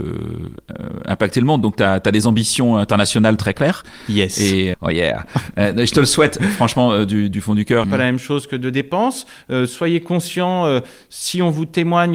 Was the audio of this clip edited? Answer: yes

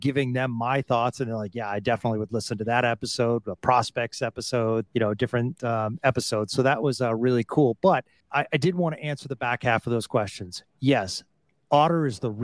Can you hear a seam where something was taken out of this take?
yes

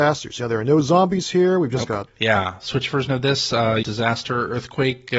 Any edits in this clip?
yes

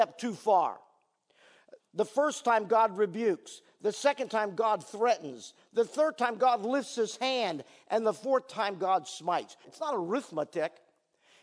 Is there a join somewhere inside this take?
yes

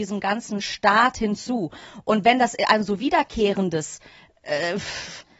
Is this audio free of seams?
yes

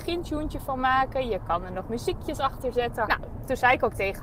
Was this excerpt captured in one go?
no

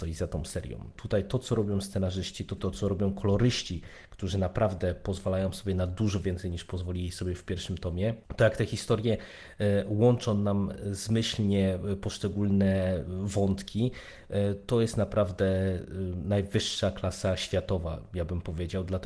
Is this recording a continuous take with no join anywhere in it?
no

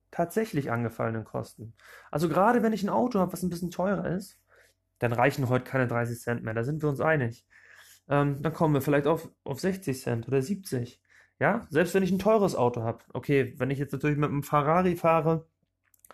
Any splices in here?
no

